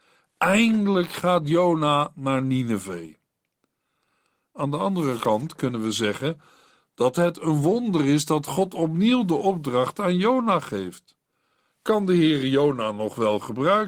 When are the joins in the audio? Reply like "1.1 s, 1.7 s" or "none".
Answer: none